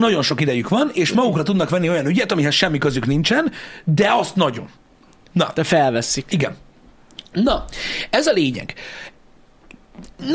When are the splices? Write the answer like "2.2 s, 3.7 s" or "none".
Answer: none